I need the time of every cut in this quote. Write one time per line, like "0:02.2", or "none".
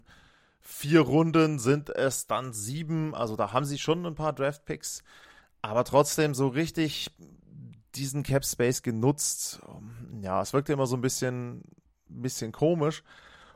none

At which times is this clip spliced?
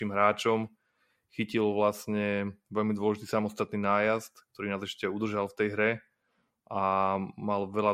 none

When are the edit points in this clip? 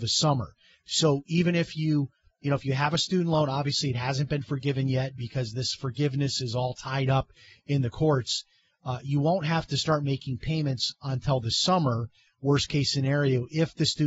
none

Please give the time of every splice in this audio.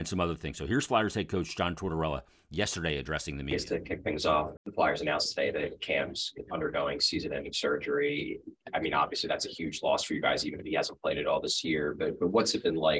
0:04.6

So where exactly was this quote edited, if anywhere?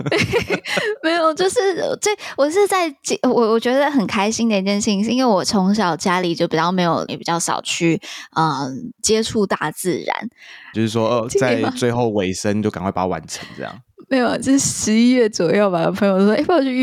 0:07.1
0:10.7

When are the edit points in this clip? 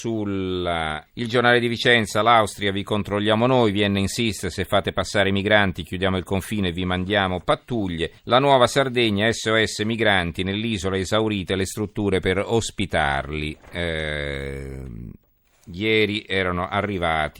0:01.1
0:08.2

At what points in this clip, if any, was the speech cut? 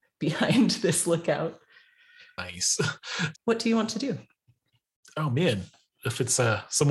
0:03.3

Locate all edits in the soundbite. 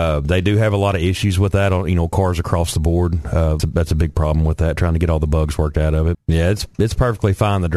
0:03.6
0:06.1

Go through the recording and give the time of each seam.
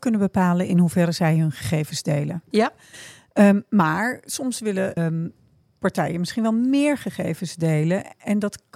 0:02.5
0:05.0

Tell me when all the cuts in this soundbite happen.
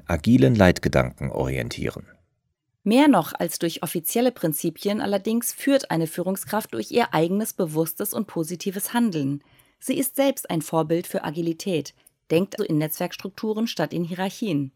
0:12.6

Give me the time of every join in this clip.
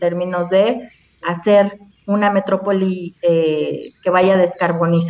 0:01.2

